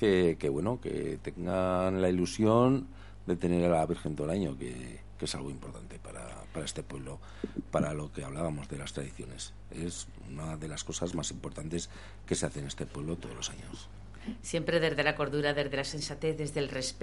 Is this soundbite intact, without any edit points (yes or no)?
yes